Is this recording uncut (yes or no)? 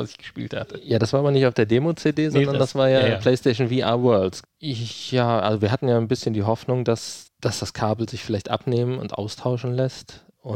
no